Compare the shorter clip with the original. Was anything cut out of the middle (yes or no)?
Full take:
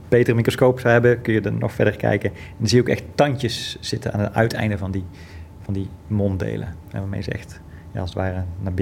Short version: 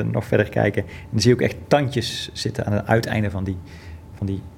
no